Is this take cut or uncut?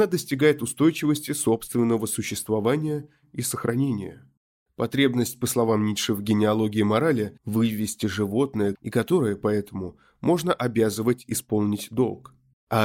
cut